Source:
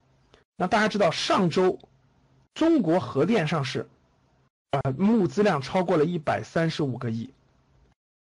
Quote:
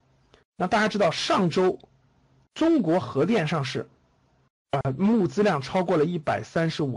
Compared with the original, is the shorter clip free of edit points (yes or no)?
yes